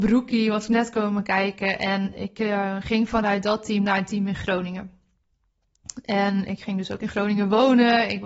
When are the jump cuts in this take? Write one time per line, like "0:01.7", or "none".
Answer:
none